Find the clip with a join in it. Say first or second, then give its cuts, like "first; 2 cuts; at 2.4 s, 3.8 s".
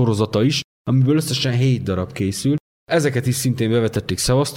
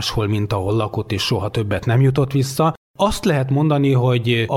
first; 1 cut; at 2.8 s